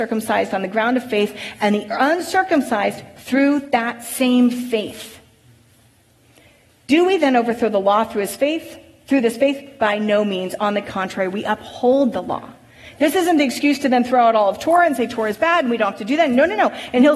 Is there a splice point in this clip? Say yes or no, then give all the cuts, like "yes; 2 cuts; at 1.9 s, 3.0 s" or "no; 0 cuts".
no; 0 cuts